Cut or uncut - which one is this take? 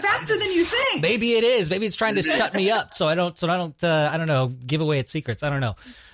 uncut